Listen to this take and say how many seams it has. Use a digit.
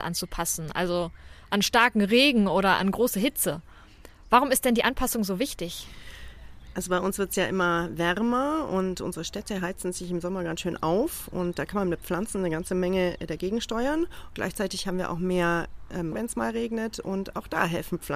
1